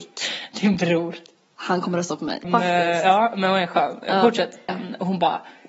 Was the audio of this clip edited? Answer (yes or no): yes